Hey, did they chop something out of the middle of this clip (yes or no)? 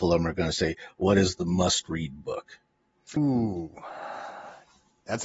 yes